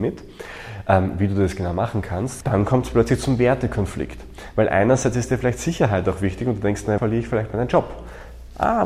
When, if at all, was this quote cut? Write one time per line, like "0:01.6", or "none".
0:02.4
0:07.0